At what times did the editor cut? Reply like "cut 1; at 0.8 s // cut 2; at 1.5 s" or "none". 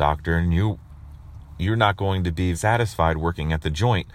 cut 1; at 2.5 s